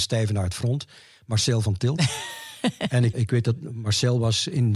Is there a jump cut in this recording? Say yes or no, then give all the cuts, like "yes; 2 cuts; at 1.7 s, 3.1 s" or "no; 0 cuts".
yes; 1 cut; at 3.1 s